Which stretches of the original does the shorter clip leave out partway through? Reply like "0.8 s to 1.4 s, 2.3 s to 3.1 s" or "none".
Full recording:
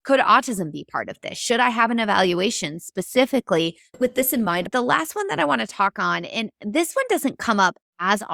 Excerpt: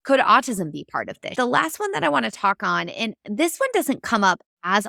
1.3 s to 4.7 s